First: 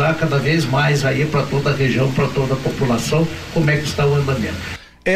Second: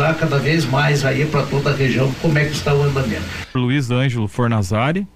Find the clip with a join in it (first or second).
second